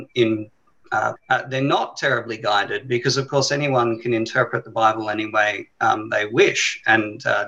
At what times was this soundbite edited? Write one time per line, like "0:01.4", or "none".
0:01.2